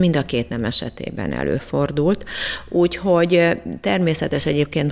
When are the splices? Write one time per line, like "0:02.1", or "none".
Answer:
none

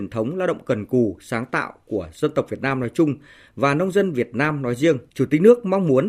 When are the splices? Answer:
0:05.1

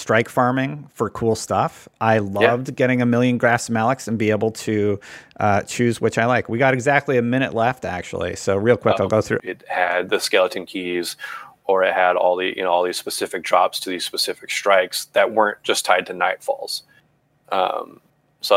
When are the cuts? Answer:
0:09.4

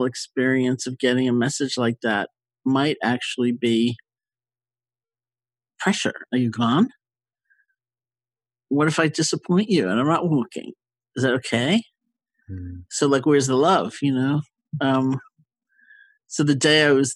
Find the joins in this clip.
0:06.3

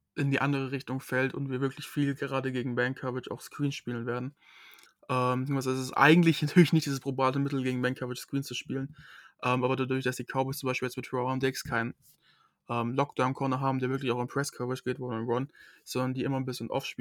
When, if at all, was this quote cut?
none

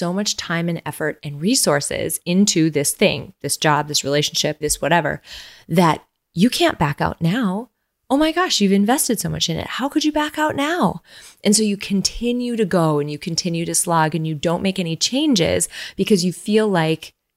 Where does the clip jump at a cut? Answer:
0:04.6

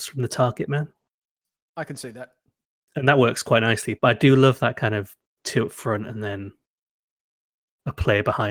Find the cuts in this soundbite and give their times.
0:04.0

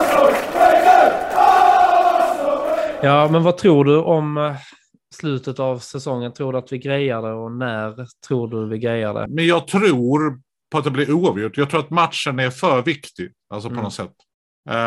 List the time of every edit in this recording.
0:09.3

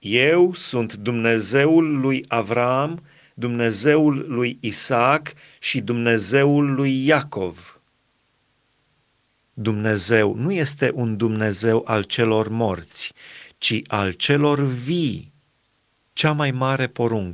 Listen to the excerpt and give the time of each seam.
0:16.0

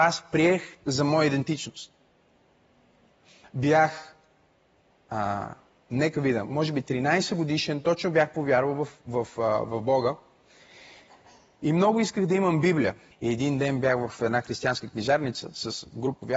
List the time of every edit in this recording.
0:13.1

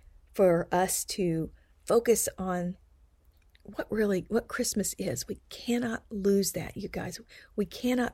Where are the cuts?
none

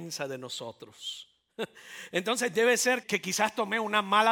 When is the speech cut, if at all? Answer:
0:03.0

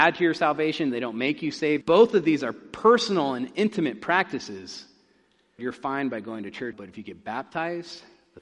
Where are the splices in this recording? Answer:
0:01.8
0:05.6
0:06.7

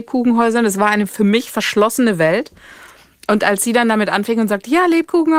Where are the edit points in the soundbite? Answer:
none

